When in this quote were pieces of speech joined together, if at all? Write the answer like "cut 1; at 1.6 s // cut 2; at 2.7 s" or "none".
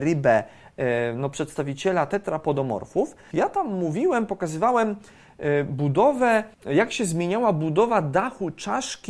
cut 1; at 3.3 s // cut 2; at 6.5 s